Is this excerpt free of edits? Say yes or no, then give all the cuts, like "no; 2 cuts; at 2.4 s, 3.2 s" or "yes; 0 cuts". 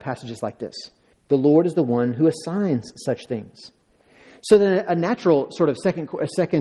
no; 1 cut; at 1.1 s